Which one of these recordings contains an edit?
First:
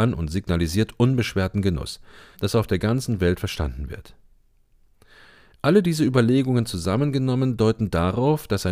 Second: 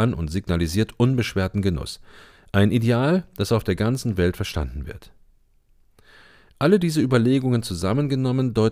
first; 1 cut; at 2.3 s

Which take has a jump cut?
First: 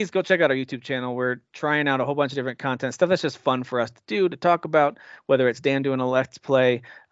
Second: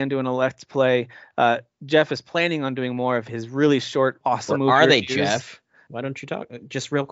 second; 2 cuts; at 4.2 s, 5.9 s

